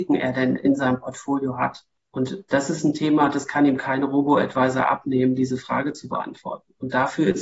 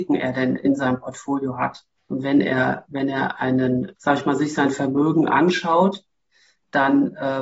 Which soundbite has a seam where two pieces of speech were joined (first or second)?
second